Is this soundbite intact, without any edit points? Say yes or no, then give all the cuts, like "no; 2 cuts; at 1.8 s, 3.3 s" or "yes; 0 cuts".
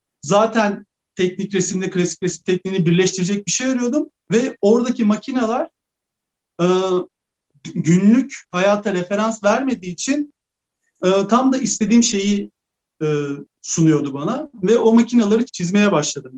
no; 1 cut; at 15.5 s